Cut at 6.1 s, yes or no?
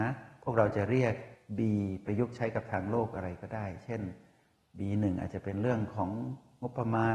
no